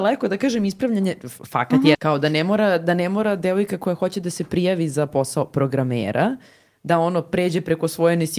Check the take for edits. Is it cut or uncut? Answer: cut